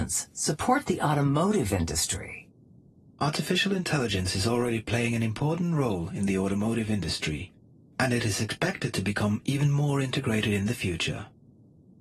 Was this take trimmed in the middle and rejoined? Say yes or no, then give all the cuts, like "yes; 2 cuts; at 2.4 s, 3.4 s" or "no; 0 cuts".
no; 0 cuts